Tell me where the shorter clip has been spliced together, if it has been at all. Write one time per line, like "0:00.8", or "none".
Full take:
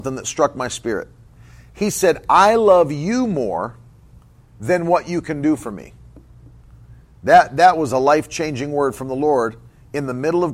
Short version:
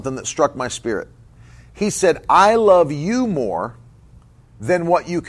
none